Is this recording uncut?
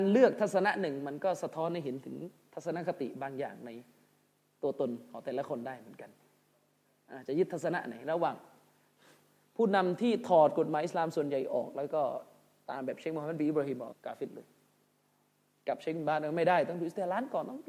no; 1 cut; at 13.9 s

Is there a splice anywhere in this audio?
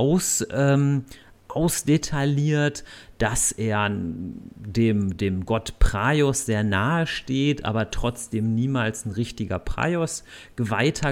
no; 0 cuts

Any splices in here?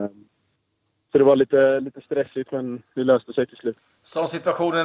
no; 0 cuts

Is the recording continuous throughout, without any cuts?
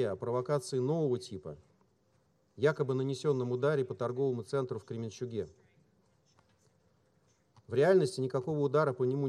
yes; 0 cuts

